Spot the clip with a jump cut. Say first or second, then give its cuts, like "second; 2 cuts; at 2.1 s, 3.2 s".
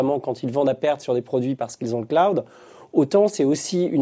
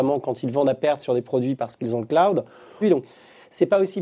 second; 1 cut; at 2.8 s